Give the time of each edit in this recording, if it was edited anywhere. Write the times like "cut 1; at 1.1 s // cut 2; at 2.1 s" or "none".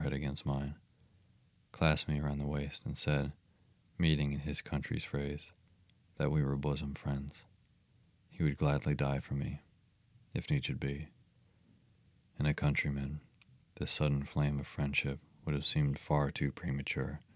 cut 1; at 3.8 s